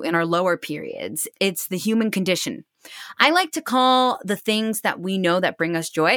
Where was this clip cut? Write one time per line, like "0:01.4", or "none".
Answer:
0:01.3

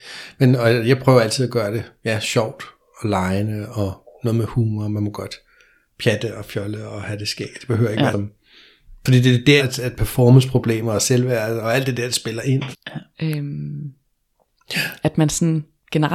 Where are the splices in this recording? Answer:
0:08.1
0:09.6
0:12.7

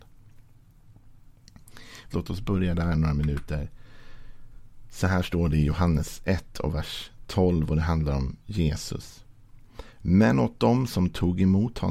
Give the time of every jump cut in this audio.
0:02.1

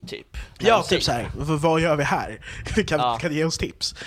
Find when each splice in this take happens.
none

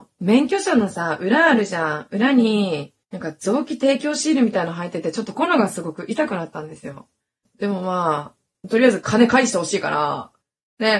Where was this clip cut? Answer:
0:03.0
0:05.3

